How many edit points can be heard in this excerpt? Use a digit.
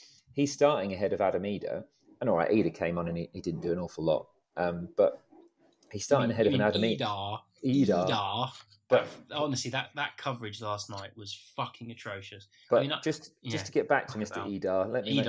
0